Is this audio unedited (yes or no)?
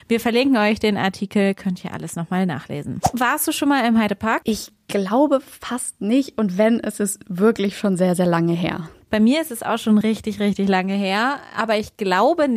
yes